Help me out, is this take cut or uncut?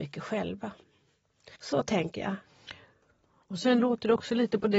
cut